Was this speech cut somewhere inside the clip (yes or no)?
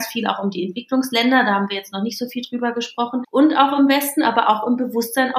no